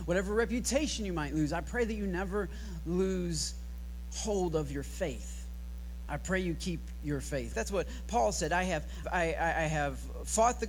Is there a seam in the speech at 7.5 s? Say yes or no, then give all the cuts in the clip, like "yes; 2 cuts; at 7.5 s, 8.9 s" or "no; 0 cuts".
yes; 3 cuts; at 6.1 s, 7.5 s, 9.0 s